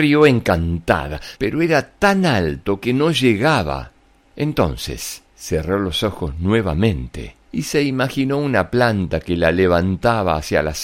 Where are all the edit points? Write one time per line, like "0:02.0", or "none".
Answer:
0:01.4
0:05.3
0:07.4